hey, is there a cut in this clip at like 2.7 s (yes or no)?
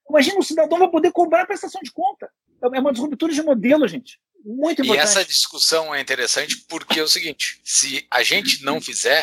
no